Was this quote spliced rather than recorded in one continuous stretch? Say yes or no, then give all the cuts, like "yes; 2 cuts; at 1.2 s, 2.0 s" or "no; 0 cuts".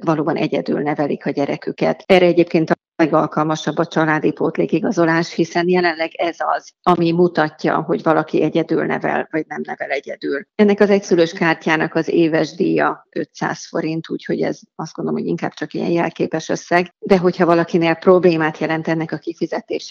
no; 0 cuts